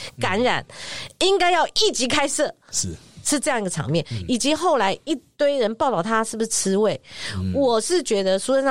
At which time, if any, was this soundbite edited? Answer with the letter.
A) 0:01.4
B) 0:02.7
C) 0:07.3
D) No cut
B